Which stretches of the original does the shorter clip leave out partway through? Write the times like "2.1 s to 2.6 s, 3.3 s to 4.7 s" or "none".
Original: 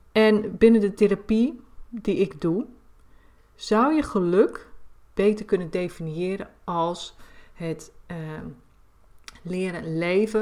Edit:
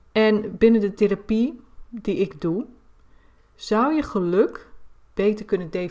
none